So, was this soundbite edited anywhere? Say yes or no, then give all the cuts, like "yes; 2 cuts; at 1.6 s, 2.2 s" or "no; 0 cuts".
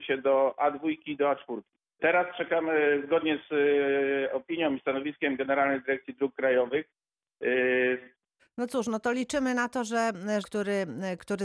yes; 3 cuts; at 2.0 s, 8.4 s, 10.4 s